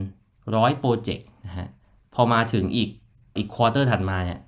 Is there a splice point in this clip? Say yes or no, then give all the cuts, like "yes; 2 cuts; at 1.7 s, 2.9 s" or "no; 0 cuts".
yes; 1 cut; at 3.4 s